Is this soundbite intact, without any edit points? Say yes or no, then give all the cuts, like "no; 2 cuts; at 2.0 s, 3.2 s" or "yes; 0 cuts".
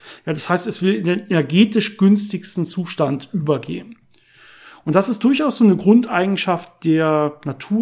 yes; 0 cuts